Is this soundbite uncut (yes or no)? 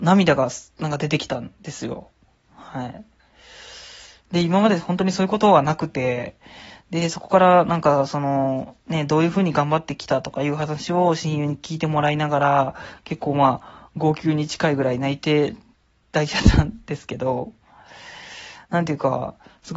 yes